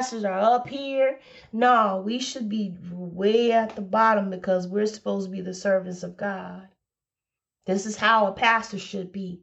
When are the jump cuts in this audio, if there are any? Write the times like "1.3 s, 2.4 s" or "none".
none